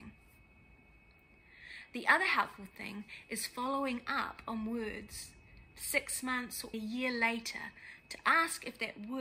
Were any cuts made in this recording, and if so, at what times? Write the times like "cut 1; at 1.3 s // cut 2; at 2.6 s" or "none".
cut 1; at 6.7 s